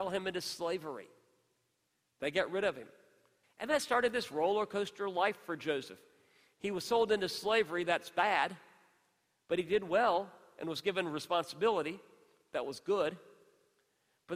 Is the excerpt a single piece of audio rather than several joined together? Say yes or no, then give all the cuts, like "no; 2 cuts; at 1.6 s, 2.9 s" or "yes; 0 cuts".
no; 1 cut; at 3.4 s